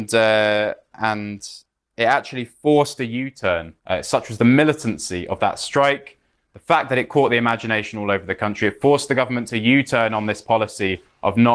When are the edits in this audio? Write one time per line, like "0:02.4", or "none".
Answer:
0:03.8